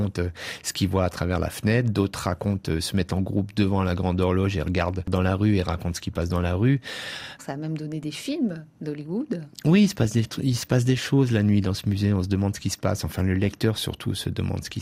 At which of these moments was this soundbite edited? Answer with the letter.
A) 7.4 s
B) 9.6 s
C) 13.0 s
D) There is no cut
A